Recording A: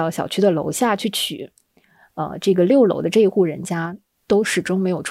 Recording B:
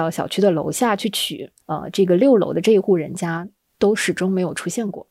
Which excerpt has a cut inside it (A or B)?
B